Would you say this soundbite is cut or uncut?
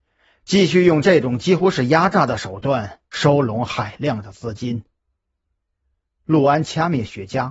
uncut